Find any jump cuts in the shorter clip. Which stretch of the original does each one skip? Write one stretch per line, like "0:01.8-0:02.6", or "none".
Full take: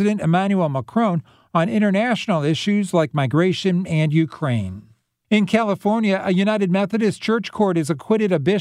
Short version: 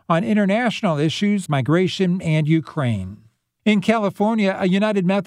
0:02.9-0:03.1